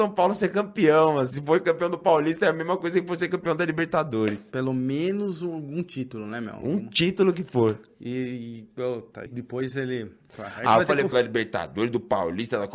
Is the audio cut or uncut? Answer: cut